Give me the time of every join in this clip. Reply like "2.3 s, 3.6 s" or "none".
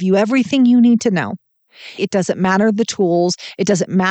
2.0 s